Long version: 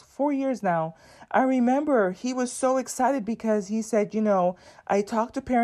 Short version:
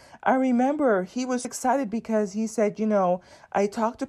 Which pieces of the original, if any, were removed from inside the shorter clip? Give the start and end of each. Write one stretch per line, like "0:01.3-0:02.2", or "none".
0:02.5-0:02.8